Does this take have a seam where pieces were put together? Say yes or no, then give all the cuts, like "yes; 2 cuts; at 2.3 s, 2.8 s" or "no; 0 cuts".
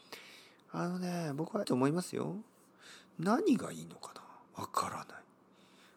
yes; 2 cuts; at 1.6 s, 4.5 s